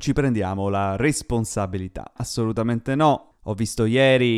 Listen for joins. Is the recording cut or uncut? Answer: cut